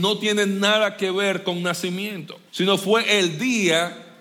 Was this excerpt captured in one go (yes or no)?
no